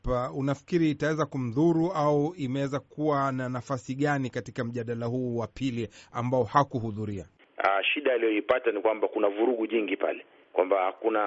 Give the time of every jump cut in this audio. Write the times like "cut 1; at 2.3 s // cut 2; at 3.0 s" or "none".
cut 1; at 7.4 s